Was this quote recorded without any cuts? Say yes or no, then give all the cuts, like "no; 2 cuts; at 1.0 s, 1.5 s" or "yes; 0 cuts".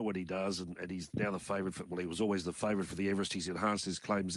yes; 0 cuts